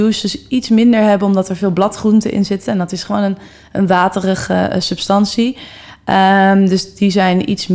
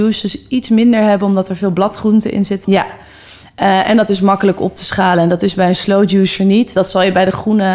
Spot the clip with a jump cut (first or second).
second